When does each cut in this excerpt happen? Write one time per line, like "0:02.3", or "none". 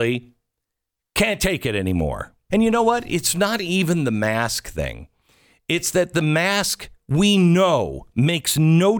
0:02.5